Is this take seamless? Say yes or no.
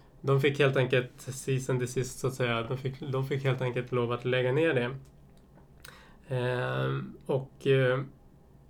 yes